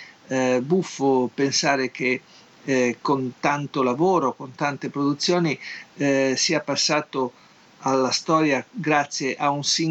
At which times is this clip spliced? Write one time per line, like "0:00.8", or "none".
none